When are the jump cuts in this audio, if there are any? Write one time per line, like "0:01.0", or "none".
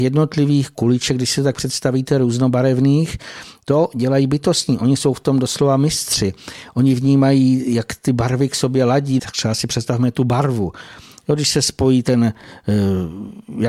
0:09.2